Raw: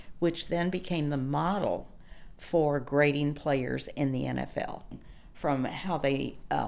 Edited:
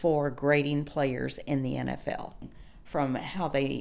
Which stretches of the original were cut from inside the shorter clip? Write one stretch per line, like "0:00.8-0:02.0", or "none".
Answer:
none